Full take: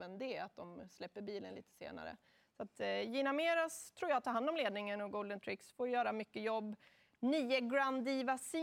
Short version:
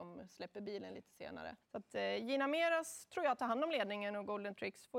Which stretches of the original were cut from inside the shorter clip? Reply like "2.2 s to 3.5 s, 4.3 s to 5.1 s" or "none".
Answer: 2.2 s to 2.5 s